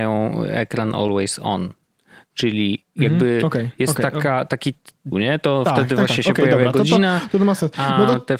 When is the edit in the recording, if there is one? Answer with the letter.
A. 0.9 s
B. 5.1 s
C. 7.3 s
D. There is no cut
B